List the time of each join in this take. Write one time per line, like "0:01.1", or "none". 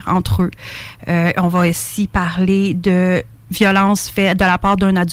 none